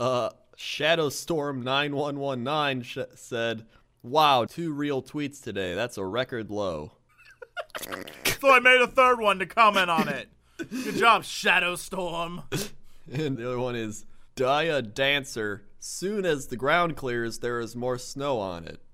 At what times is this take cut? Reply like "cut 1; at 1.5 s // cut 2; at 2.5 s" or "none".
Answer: cut 1; at 4.5 s // cut 2; at 13.4 s